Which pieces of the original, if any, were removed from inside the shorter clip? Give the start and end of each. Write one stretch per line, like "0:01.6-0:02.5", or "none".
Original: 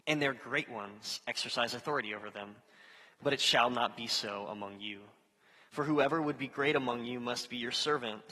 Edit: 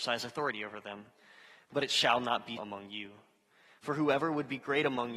0:04.1-0:04.5